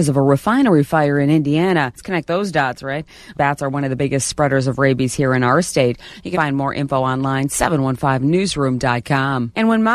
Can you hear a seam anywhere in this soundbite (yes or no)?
yes